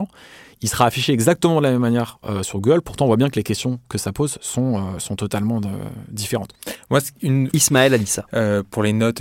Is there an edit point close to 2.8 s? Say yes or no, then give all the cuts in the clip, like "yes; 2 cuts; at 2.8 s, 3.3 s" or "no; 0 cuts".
no; 1 cut; at 7.5 s